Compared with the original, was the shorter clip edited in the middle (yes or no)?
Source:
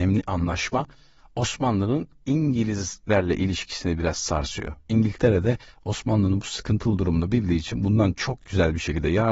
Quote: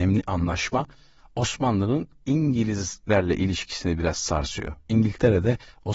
no